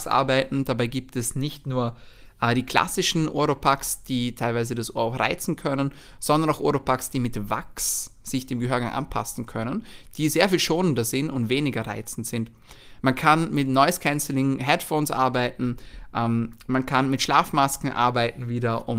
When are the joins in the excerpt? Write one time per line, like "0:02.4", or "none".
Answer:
none